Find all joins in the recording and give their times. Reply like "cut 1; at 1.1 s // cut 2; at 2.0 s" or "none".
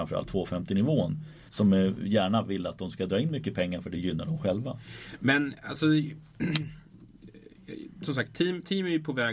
cut 1; at 1.5 s